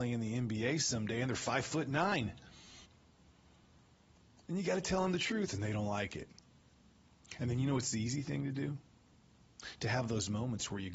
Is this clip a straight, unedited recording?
yes; 0 cuts

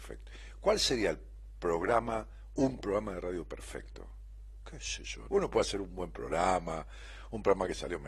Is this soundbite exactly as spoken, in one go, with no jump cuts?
no; 1 cut; at 5.3 s

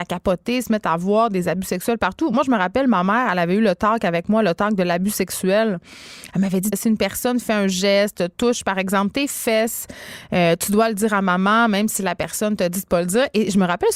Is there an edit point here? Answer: yes; 1 cut; at 6.7 s

